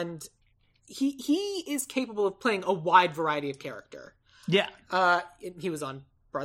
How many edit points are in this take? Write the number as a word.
zero